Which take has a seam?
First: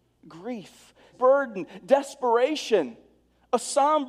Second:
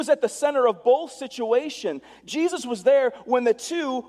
first; 1 cut; at 1.1 s

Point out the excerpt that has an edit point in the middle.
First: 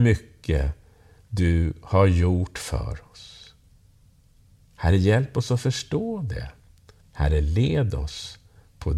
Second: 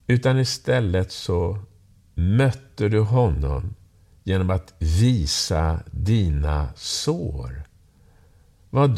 first; 1 cut; at 7.0 s

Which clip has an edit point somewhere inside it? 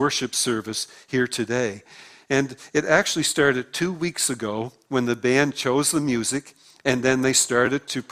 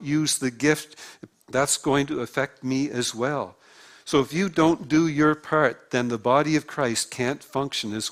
second; 1 cut; at 1.3 s

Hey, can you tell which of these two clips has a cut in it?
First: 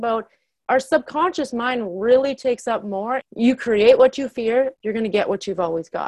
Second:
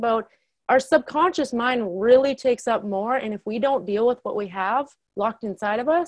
first; 2 cuts; at 3.2 s, 4.7 s

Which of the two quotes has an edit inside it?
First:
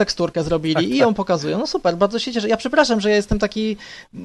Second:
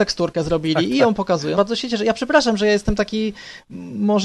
second; 1 cut; at 1.5 s

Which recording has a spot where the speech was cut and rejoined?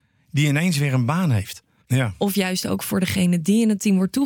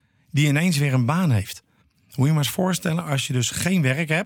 first; 1 cut; at 1.8 s

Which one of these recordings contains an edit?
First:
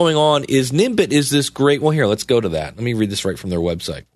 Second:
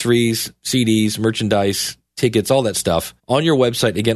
second; 1 cut; at 3.2 s

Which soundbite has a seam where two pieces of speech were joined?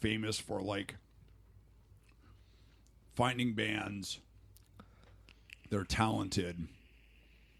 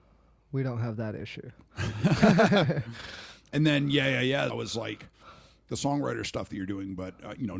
second; 2 cuts; at 4.5 s, 5.7 s

